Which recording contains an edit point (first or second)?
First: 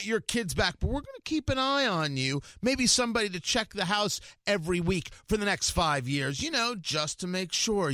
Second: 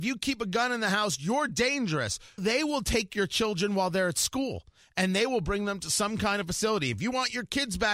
second